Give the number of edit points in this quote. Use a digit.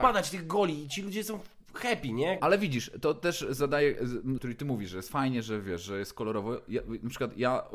2